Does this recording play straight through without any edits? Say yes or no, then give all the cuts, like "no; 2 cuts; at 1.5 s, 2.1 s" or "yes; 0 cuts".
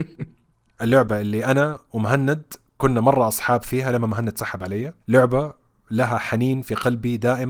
no; 1 cut; at 5.0 s